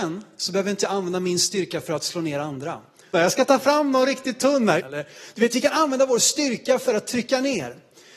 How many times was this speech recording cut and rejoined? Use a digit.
2